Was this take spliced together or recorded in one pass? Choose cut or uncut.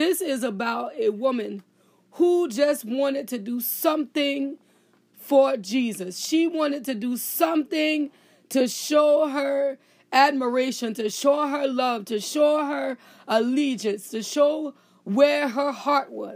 uncut